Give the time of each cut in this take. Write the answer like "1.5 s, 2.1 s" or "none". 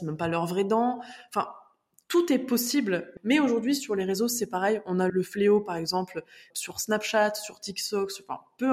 3.2 s, 5.1 s, 6.5 s